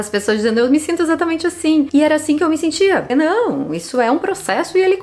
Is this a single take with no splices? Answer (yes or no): no